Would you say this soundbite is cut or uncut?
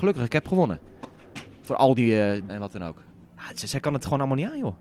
cut